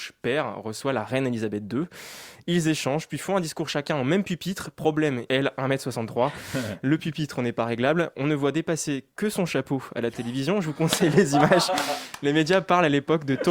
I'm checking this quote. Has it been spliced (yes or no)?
yes